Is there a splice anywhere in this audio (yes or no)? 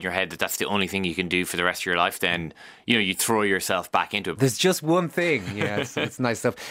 yes